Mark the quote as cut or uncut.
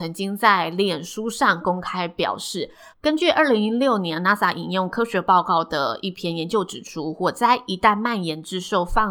cut